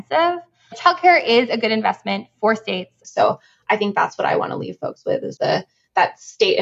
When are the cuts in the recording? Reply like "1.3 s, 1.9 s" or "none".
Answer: 3.0 s, 5.4 s